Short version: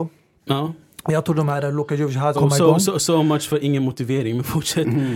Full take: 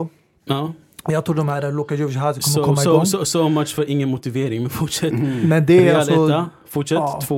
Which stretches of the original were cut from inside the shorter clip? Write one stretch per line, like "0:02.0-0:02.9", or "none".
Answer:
0:02.3-0:02.6